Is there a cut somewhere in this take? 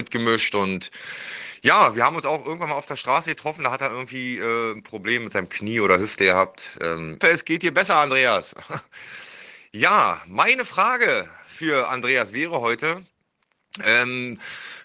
yes; 1 cut; at 7.2 s

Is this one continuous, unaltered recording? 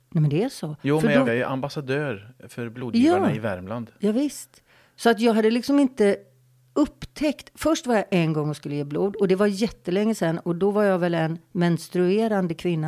no; 1 cut; at 1.3 s

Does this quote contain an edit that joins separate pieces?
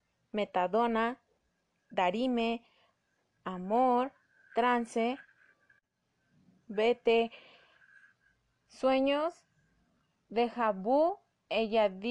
no; 0 cuts

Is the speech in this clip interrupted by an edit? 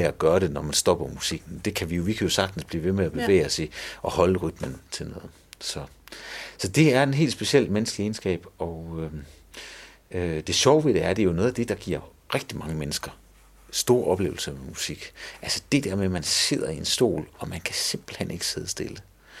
no; 0 cuts

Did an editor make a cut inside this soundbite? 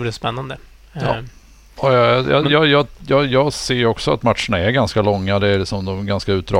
no; 0 cuts

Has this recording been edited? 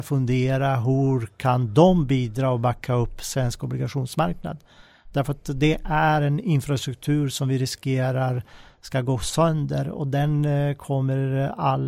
no; 0 cuts

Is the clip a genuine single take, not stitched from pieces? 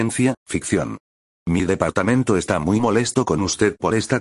yes; 0 cuts

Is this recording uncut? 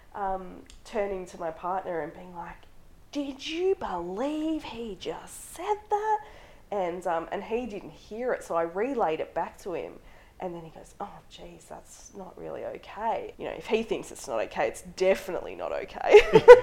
no; 1 cut; at 13.3 s

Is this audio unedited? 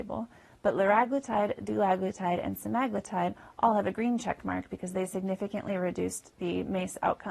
yes; 0 cuts

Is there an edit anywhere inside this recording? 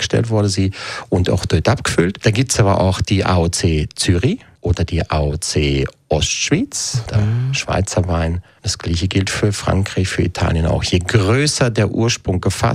no; 0 cuts

